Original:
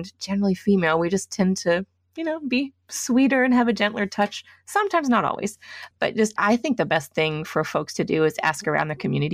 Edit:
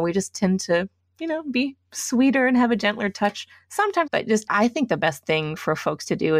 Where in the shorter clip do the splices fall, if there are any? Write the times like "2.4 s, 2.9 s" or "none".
4.0 s

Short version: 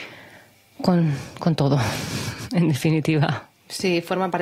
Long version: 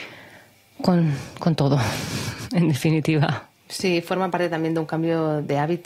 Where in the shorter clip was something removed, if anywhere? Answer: none

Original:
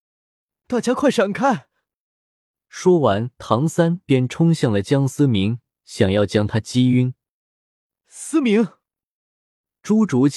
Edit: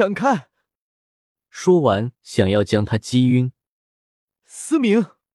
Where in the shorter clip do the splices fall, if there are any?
2.1 s

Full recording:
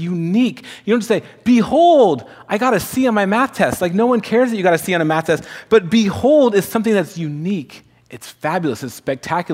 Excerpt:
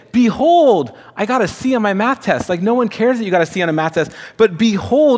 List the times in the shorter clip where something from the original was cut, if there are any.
none

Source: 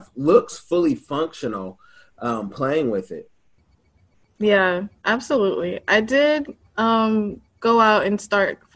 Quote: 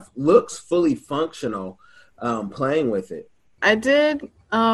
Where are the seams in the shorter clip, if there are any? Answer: 3.6 s

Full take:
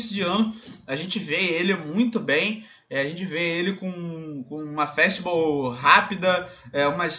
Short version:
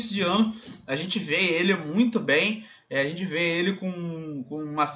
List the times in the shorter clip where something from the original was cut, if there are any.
none

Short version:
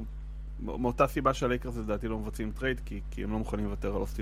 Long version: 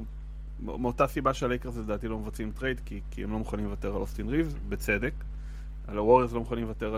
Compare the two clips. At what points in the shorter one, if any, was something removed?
none

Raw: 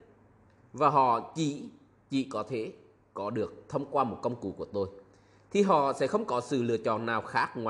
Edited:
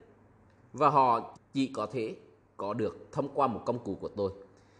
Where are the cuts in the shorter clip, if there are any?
1.3 s

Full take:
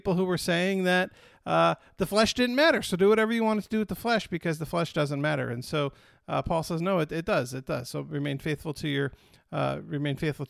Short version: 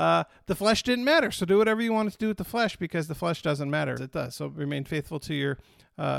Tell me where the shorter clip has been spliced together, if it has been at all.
4.0 s

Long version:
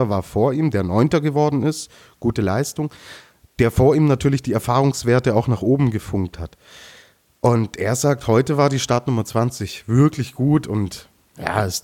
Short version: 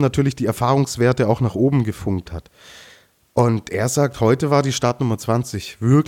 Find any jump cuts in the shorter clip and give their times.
none

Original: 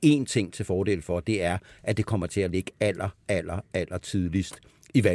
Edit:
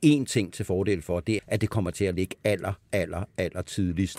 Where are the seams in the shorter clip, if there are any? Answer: 1.4 s

